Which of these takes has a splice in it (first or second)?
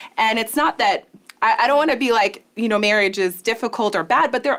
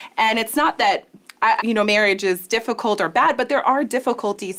second